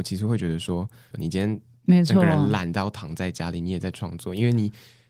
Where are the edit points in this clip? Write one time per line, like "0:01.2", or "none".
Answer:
0:01.1